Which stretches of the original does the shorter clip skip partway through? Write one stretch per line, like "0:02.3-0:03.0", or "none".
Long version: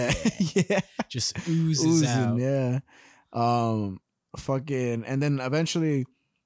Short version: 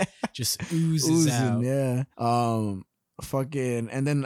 0:02.9-0:03.3